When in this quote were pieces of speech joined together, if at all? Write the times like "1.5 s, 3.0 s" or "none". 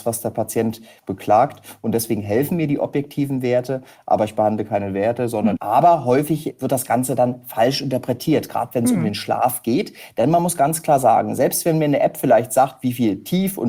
5.6 s